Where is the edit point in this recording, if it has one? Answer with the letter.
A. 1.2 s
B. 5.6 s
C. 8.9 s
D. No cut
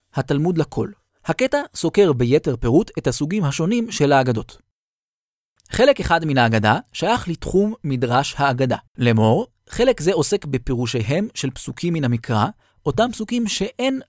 C